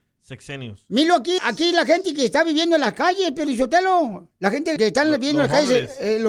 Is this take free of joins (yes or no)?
no